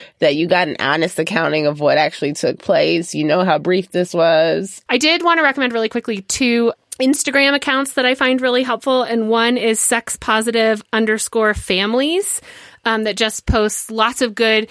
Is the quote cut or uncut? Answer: cut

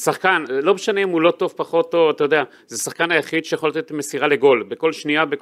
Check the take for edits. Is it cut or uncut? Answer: uncut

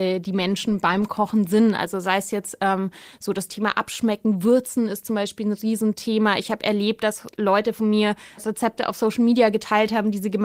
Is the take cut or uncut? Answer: cut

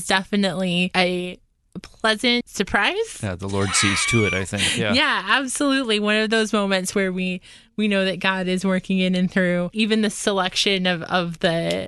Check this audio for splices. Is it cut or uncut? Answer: uncut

